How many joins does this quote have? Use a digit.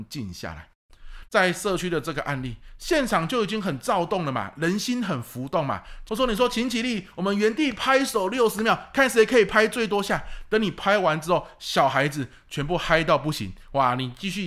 2